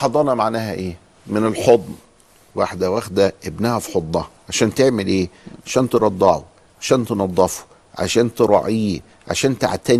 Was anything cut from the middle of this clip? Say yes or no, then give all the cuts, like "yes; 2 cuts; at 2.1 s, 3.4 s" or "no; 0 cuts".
no; 0 cuts